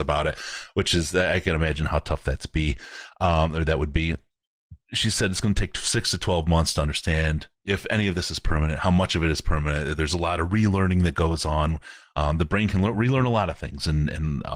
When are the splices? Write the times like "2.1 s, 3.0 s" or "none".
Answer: 7.5 s